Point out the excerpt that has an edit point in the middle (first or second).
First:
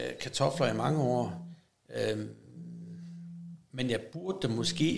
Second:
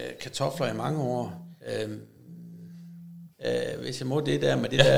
second